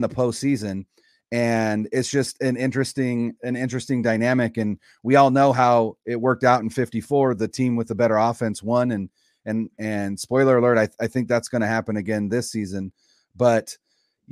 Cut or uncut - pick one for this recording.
uncut